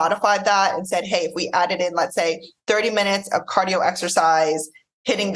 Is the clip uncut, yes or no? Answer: yes